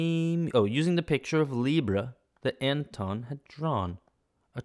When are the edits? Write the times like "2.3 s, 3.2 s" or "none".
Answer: none

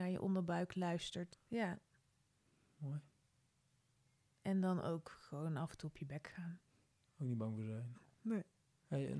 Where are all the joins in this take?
1.3 s, 7.9 s

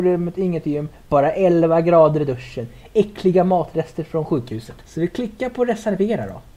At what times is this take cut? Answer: 4.8 s

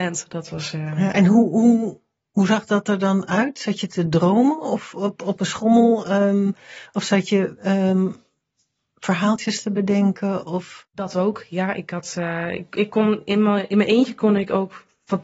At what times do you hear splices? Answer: none

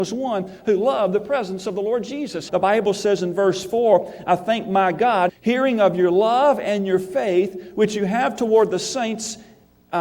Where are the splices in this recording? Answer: 2.5 s, 5.3 s

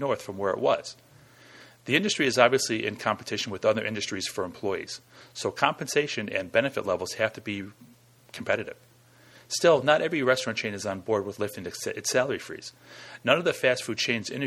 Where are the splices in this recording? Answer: none

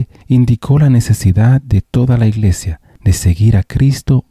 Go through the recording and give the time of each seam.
none

